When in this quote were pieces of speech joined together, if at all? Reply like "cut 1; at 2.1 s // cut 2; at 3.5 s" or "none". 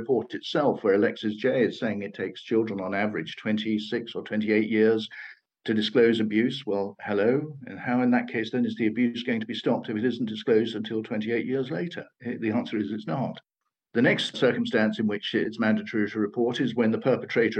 none